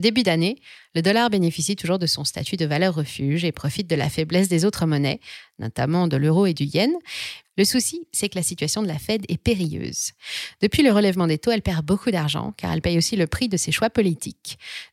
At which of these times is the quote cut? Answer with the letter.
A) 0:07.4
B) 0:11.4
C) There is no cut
A